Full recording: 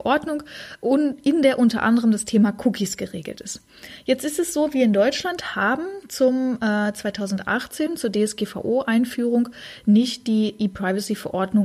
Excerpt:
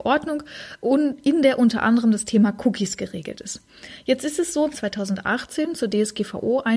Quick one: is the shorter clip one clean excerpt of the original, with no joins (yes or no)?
no